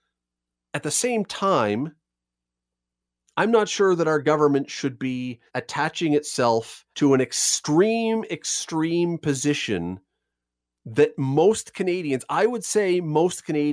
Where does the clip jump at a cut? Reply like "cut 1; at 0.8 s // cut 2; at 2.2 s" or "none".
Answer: cut 1; at 5.5 s // cut 2; at 6.9 s